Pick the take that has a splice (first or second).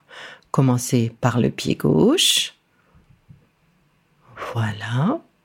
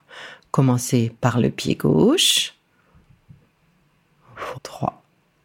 second